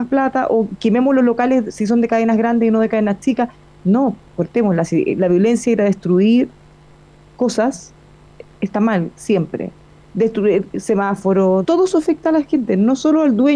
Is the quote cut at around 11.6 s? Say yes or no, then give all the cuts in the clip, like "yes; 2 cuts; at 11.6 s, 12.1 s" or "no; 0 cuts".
yes; 1 cut; at 11.6 s